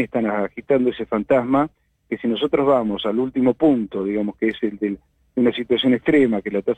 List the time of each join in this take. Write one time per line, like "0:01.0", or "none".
none